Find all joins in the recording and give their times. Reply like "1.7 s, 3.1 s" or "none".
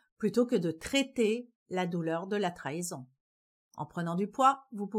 3.7 s

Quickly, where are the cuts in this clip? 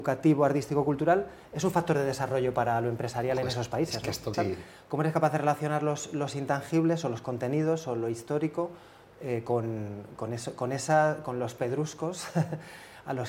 4.3 s

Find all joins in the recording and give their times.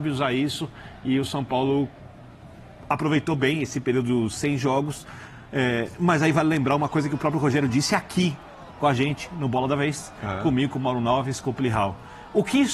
none

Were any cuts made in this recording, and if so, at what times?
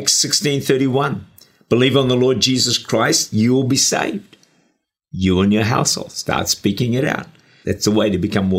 7.6 s

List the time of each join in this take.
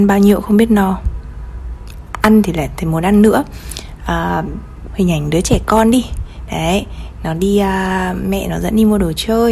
4.9 s

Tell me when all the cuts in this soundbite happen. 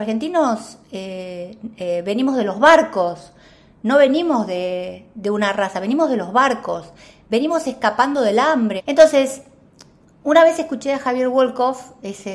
8.8 s

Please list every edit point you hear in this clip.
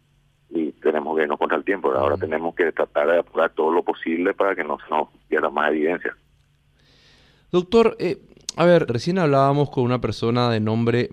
8.9 s

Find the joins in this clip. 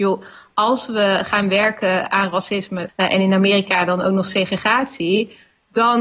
2.9 s

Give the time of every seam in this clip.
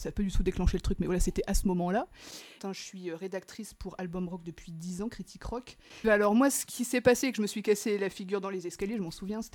2.6 s, 6.0 s

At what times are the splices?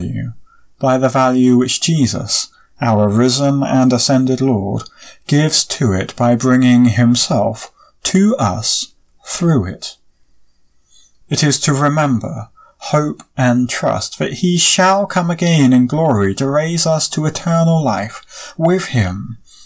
11.2 s

